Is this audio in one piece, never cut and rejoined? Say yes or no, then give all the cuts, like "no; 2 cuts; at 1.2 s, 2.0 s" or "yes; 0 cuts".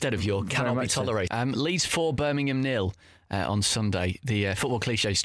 no; 1 cut; at 1.3 s